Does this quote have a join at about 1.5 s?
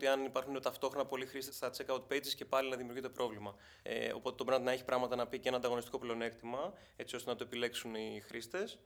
yes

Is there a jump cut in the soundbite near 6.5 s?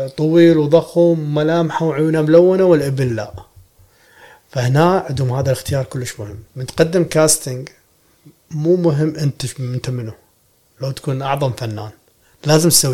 yes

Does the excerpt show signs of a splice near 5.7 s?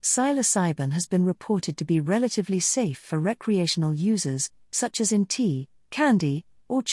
no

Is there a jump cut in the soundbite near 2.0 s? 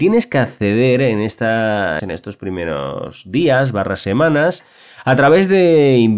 yes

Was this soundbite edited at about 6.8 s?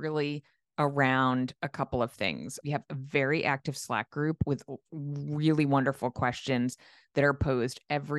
no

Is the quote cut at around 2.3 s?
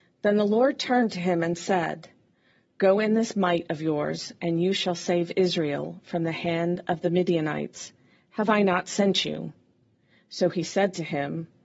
no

